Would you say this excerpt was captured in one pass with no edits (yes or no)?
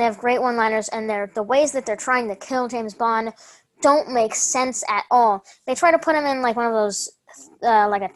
yes